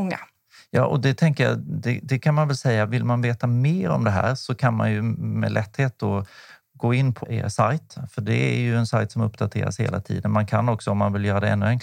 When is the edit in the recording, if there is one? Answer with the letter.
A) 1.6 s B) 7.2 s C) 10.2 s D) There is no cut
B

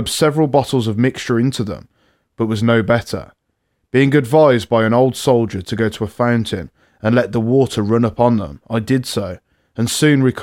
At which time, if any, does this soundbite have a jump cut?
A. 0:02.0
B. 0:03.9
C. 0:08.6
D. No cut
D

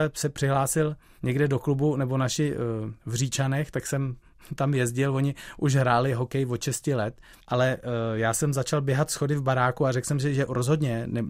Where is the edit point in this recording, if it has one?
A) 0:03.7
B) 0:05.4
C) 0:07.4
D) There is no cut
C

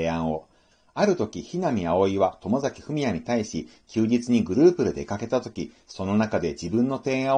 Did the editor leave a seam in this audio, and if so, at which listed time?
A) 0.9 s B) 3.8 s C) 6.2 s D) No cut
D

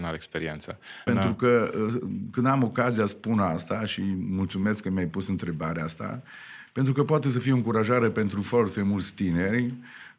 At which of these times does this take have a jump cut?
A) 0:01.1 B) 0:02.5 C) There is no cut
A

